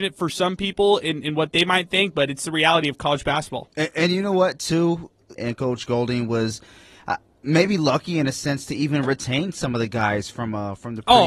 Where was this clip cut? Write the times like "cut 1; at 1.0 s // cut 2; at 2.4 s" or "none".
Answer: cut 1; at 5.4 s